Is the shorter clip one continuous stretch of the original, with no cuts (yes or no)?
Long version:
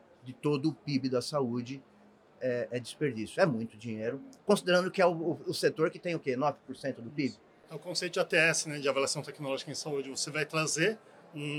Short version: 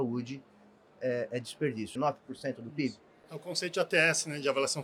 no